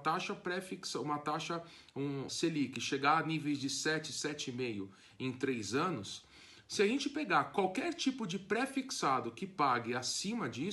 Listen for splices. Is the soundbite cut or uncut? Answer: cut